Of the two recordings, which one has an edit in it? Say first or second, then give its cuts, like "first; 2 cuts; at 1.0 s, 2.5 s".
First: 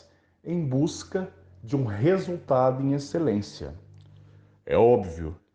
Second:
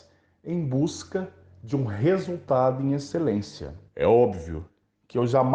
second; 1 cut; at 3.9 s